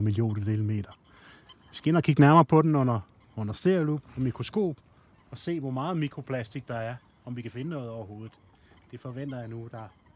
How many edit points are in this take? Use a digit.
0